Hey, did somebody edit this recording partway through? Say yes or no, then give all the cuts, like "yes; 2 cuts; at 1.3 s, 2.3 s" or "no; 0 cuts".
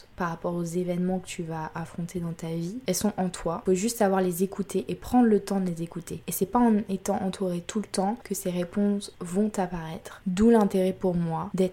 no; 0 cuts